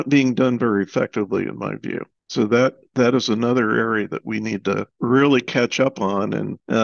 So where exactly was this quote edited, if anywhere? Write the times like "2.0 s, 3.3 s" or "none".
none